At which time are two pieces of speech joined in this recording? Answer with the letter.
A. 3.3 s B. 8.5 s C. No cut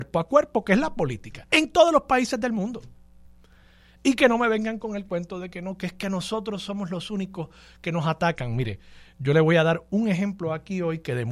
C